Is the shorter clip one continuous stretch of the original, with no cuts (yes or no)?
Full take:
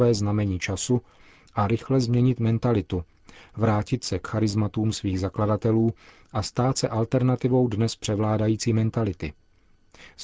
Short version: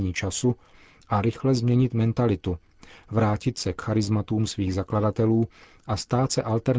yes